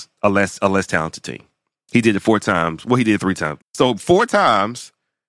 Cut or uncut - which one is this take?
cut